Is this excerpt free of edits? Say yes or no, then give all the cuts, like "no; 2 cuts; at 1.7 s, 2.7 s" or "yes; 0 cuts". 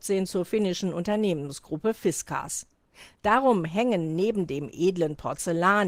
yes; 0 cuts